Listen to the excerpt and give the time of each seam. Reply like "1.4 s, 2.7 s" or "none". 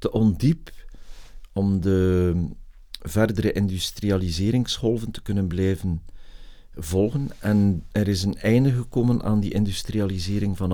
none